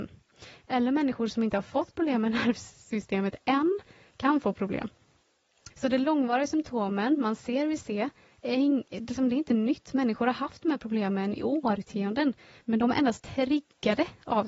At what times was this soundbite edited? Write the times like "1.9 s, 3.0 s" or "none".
5.7 s